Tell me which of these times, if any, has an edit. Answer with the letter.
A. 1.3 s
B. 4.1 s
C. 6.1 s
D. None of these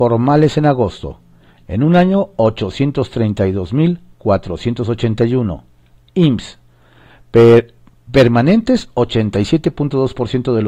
D